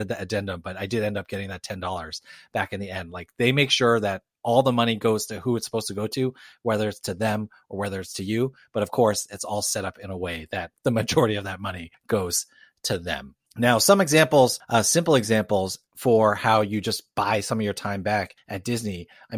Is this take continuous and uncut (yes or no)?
yes